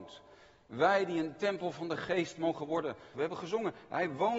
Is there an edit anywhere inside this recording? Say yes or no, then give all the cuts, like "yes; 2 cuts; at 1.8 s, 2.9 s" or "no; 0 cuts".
yes; 1 cut; at 3.1 s